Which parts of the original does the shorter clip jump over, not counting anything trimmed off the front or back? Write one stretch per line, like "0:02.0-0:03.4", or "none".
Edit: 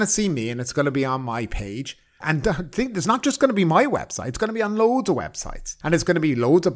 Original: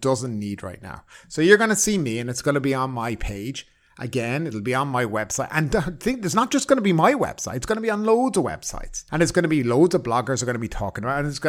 0:03.9-0:05.5